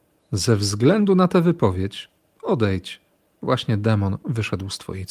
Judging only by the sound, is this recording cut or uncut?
uncut